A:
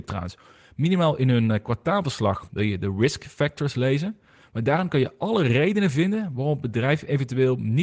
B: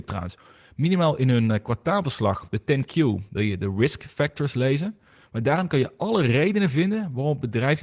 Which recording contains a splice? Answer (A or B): A